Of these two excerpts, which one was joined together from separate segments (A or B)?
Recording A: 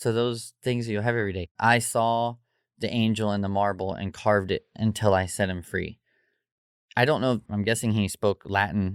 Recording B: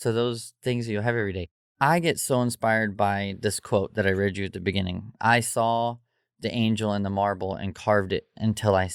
A